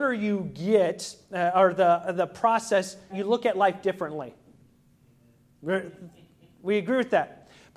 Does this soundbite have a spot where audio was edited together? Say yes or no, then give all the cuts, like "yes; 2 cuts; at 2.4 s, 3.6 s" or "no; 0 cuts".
yes; 1 cut; at 3.1 s